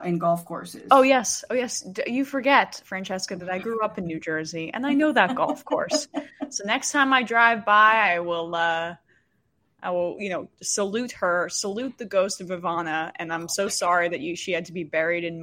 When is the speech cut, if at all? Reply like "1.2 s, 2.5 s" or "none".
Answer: none